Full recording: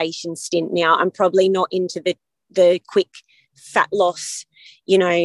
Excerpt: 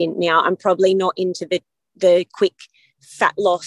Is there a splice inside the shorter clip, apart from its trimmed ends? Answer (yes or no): no